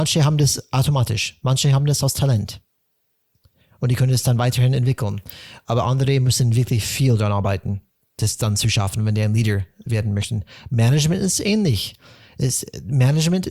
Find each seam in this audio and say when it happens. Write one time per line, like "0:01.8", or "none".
none